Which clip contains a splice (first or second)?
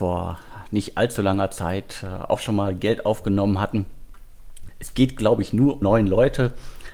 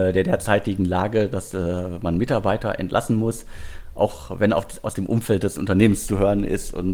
first